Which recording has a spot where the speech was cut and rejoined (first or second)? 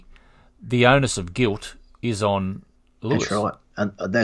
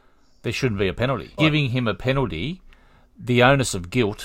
second